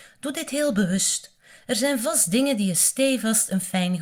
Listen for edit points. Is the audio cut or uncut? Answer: uncut